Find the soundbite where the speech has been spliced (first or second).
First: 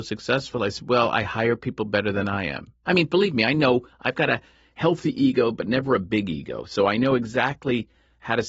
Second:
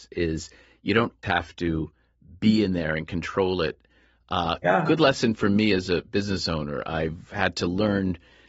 second